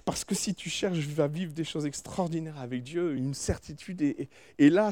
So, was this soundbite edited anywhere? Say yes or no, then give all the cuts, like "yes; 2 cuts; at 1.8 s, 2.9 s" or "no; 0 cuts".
no; 0 cuts